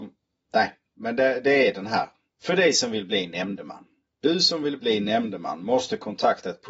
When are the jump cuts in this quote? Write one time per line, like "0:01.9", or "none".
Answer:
none